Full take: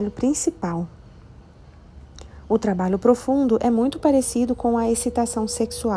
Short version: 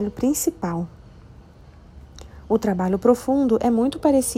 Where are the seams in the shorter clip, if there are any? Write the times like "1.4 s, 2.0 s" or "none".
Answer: none